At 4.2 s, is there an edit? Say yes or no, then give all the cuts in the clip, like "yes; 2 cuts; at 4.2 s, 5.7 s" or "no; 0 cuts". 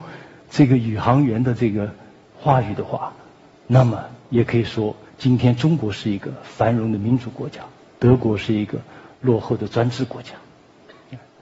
yes; 1 cut; at 4.2 s